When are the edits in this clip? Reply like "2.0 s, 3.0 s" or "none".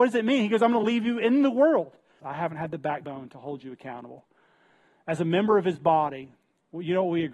2.2 s